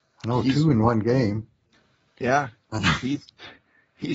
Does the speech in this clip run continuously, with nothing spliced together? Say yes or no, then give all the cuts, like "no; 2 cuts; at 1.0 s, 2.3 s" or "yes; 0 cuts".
yes; 0 cuts